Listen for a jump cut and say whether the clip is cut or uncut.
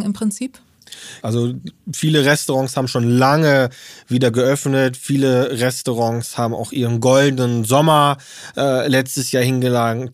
cut